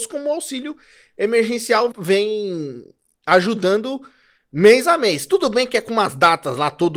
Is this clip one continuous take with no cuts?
no; 1 cut; at 1.9 s

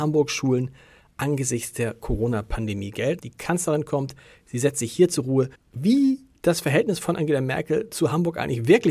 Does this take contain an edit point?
yes; 2 cuts; at 3.2 s, 5.5 s

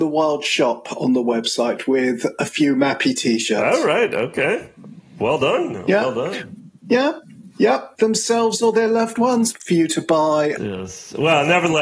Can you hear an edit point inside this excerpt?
yes; 3 cuts; at 8.0 s, 9.5 s, 10.6 s

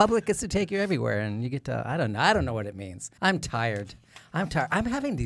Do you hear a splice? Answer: yes; 1 cut; at 3.2 s

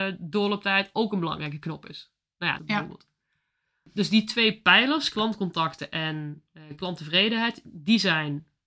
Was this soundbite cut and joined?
yes; 1 cut; at 2.6 s

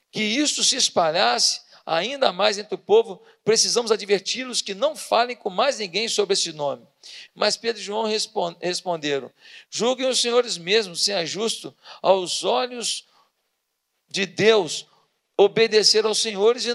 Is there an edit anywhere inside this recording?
yes; 1 cut; at 7.3 s

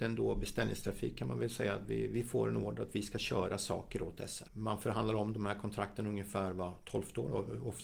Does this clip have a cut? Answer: no; 0 cuts

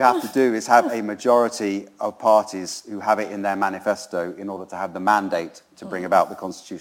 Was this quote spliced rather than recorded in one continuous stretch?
no; 0 cuts

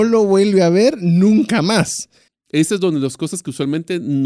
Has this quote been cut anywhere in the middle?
yes; 1 cut; at 2.3 s

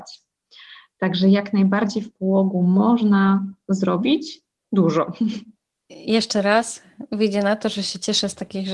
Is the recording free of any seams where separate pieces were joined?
no; 1 cut; at 5.8 s

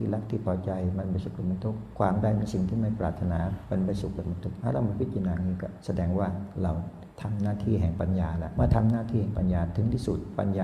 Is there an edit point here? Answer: no; 0 cuts

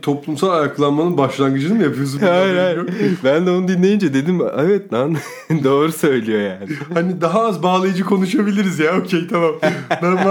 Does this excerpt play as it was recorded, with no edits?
yes; 0 cuts

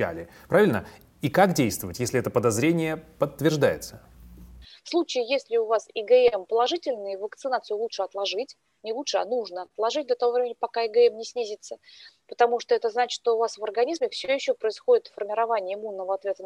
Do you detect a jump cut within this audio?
no; 0 cuts

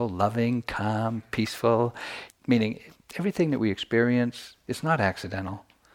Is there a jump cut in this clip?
yes; 1 cut; at 2.3 s

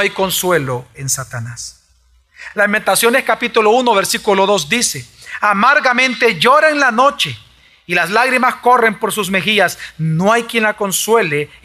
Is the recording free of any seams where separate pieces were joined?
yes; 0 cuts

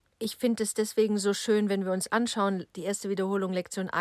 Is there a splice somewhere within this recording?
yes; 1 cut; at 2.7 s

